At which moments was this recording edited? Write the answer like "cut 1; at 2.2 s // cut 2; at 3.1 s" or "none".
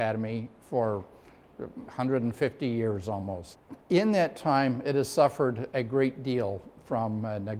cut 1; at 3.8 s